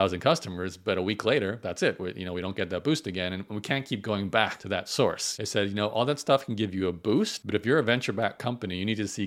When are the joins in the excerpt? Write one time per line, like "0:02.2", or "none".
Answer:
0:05.4